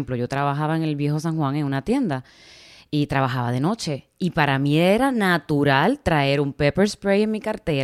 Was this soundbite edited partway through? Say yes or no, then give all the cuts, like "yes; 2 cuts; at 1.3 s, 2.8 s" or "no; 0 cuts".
no; 0 cuts